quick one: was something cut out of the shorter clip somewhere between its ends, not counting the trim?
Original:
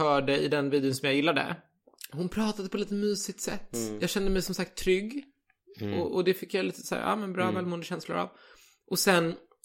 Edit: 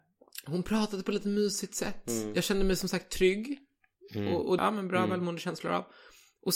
yes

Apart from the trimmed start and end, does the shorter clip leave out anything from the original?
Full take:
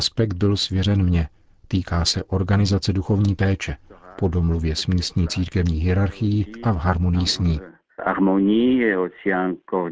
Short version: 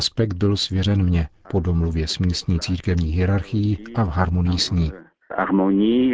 yes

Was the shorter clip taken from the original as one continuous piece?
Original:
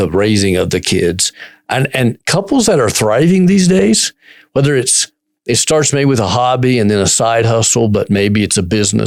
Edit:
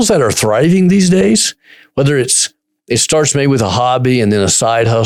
yes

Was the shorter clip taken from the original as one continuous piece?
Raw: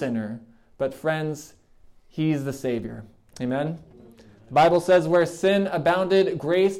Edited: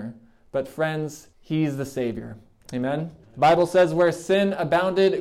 no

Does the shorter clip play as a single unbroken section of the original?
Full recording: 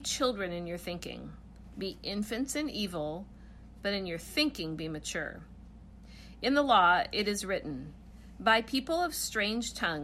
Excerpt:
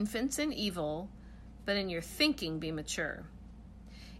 yes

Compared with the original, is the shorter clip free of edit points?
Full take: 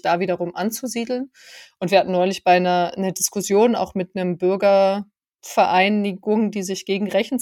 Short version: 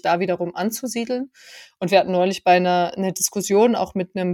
yes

